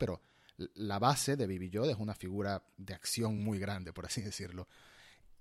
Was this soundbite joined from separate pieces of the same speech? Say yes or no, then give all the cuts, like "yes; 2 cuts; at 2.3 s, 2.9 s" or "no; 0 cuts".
no; 0 cuts